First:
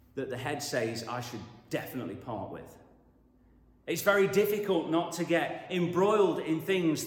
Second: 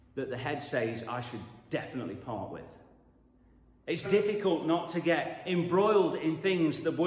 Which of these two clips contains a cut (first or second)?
second